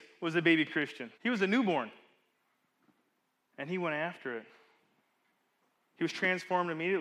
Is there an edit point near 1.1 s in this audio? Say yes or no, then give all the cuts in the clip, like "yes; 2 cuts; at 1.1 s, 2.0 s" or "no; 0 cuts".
yes; 1 cut; at 1.1 s